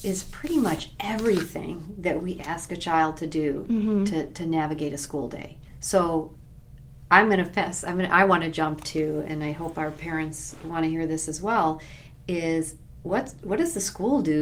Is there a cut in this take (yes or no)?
yes